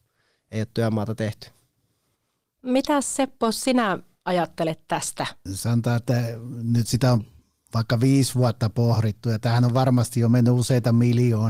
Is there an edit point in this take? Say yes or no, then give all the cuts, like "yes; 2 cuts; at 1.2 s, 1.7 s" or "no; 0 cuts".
yes; 1 cut; at 5.5 s